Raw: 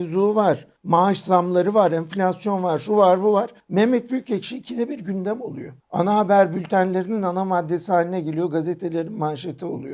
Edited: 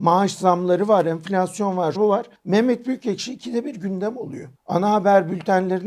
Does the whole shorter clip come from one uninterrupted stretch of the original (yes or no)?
no